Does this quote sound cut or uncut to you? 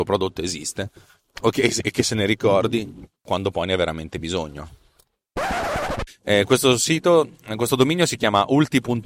cut